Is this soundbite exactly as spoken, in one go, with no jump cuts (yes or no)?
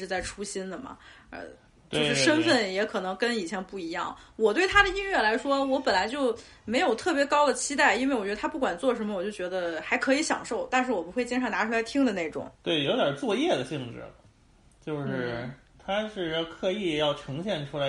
no